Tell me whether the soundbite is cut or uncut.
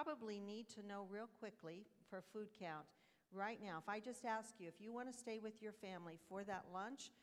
uncut